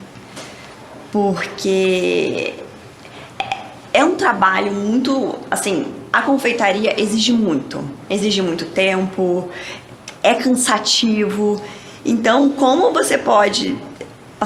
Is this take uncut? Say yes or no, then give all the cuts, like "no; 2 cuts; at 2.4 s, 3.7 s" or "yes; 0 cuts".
yes; 0 cuts